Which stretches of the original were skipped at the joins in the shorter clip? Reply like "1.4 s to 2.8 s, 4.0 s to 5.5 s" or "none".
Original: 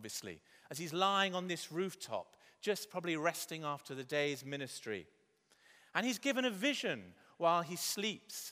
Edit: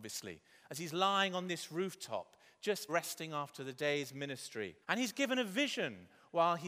2.9 s to 3.2 s, 5.1 s to 5.9 s